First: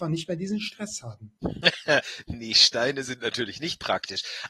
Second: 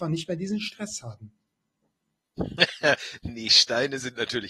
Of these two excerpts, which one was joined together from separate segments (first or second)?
first